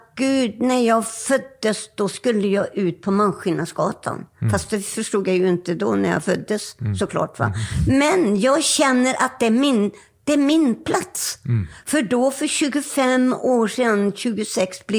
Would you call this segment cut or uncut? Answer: uncut